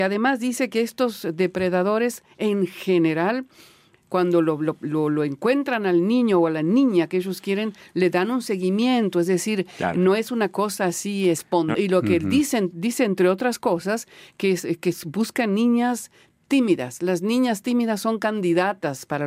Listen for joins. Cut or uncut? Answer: cut